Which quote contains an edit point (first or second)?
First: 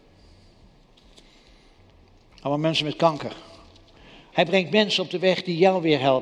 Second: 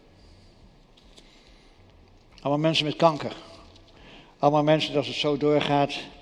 first